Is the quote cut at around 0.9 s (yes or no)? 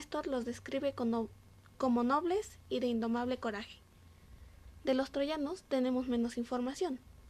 no